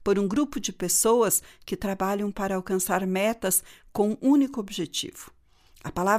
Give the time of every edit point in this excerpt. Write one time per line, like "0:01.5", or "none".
0:04.2